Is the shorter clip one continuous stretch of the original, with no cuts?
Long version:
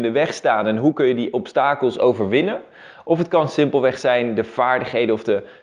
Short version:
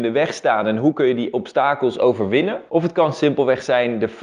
no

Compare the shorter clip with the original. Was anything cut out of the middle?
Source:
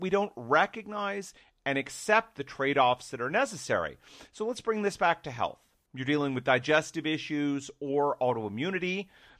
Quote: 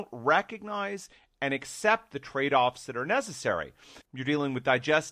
yes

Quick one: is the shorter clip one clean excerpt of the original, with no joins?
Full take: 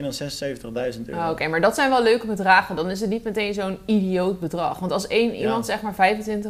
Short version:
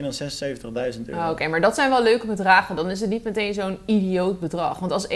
yes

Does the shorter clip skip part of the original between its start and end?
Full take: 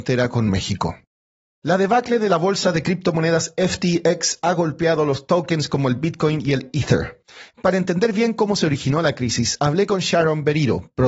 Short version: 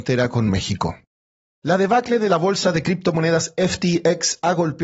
no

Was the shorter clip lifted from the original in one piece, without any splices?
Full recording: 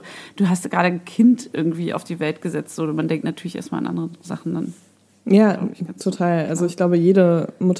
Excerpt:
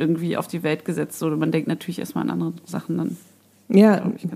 yes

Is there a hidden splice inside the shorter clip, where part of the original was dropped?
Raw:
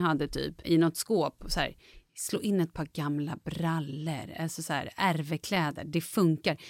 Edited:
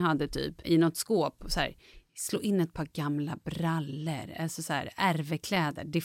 no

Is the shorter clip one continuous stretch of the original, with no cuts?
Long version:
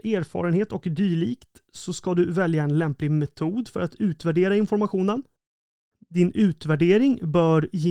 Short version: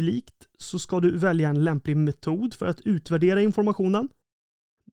yes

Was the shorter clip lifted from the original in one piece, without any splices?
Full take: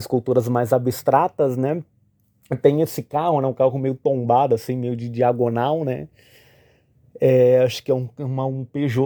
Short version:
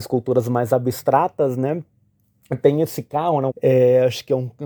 no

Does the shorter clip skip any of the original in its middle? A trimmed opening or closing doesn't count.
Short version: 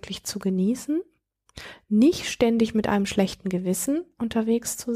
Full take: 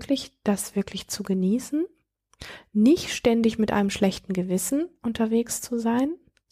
no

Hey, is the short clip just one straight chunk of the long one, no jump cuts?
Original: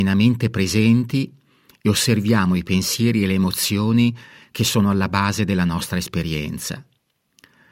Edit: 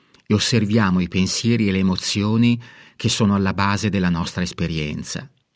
yes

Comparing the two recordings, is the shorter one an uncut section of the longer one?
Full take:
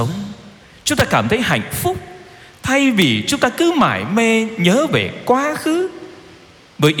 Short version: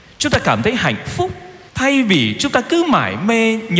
no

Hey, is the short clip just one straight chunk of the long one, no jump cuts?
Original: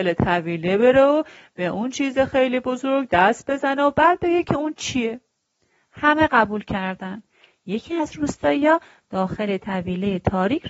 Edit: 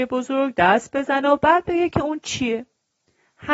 yes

